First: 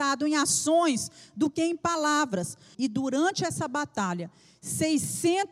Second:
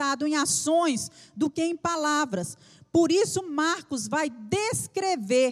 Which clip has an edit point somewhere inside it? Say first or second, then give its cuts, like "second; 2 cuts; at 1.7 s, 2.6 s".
first; 1 cut; at 2.7 s